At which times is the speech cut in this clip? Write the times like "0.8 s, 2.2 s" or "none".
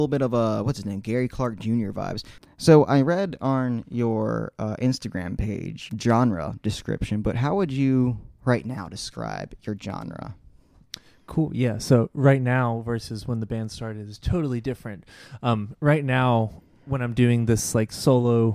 5.9 s